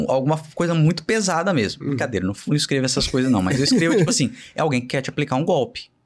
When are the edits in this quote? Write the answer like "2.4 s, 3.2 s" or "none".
none